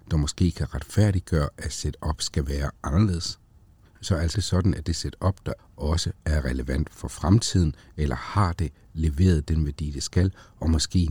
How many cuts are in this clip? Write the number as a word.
two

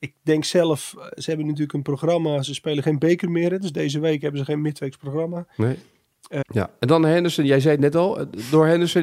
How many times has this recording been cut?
one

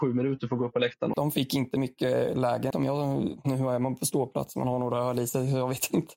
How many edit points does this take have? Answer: two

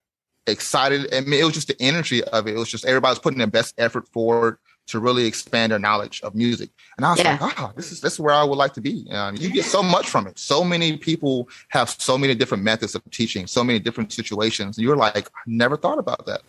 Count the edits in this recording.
one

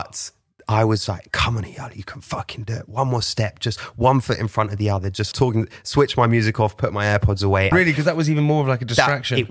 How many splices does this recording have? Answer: two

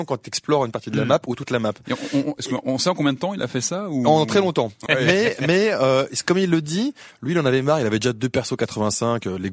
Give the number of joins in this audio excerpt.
one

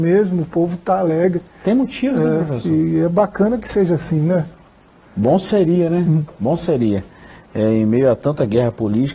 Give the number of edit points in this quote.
zero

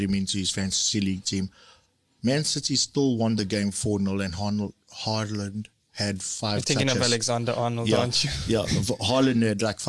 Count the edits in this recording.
zero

